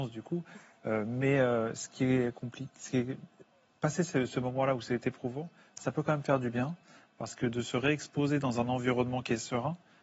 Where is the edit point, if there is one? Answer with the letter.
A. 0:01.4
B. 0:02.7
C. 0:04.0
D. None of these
D